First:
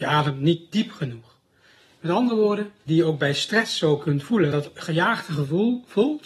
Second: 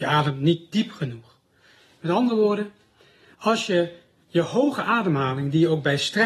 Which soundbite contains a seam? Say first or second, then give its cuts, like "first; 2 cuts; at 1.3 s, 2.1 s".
first; 2 cuts; at 2.9 s, 4.5 s